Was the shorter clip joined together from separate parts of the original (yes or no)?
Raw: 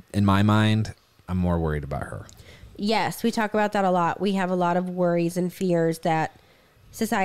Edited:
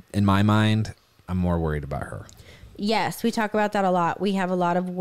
no